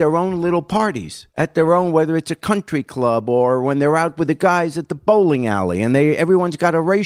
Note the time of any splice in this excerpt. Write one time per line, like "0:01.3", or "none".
0:01.3